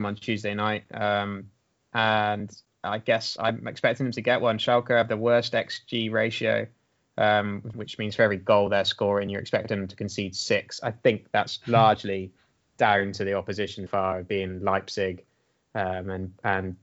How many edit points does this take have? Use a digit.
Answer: 2